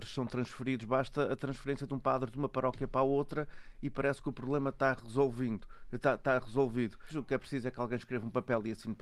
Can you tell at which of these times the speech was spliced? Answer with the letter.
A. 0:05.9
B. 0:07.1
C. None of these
B